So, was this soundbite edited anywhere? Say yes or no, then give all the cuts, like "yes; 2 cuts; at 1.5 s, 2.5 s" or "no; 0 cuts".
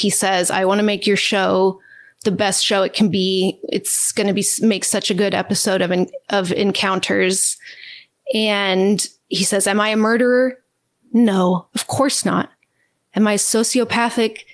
no; 0 cuts